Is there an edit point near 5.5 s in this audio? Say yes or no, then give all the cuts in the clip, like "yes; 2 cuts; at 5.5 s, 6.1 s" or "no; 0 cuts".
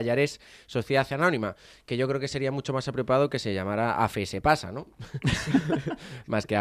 no; 0 cuts